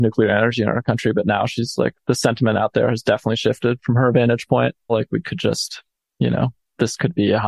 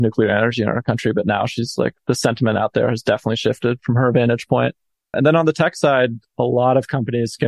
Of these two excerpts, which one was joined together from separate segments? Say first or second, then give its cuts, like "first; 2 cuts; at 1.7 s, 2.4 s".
first; 1 cut; at 4.9 s